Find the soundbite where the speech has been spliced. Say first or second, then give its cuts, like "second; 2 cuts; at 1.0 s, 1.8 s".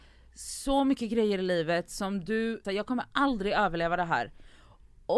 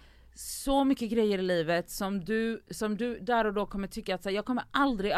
first; 1 cut; at 2.6 s